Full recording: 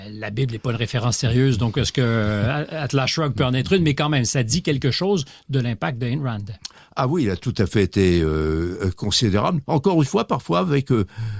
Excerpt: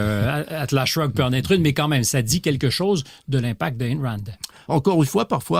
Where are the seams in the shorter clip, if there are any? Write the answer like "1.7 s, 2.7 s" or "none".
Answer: 4.7 s

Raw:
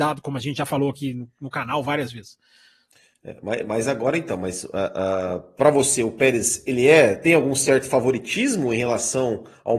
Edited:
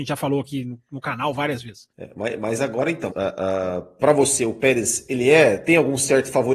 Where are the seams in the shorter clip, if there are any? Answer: 1.9 s, 3.1 s

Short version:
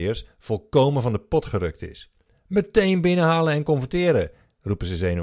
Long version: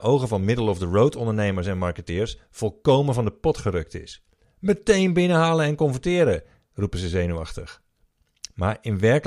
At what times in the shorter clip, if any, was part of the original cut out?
none

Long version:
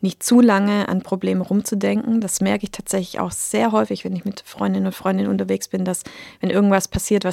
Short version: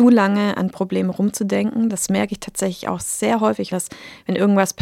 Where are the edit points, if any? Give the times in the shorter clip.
3.7 s

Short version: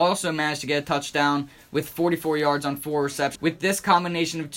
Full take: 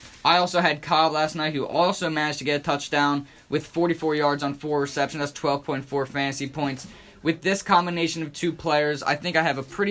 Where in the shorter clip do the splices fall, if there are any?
3.4 s

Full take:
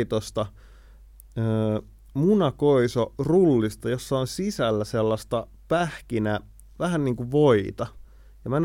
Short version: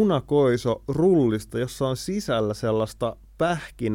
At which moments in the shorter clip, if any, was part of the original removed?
none

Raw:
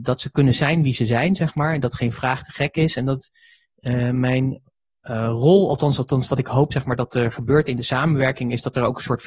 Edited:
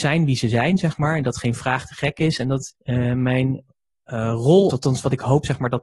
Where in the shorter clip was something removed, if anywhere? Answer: 2.8 s, 4.7 s

